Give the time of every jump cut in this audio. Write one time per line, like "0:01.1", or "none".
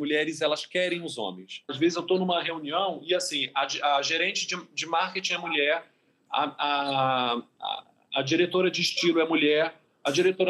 0:01.7